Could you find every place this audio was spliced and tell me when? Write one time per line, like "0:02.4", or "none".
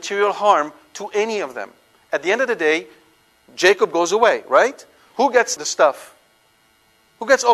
0:05.6